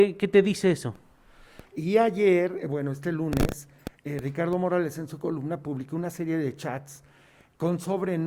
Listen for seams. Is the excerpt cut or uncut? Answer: cut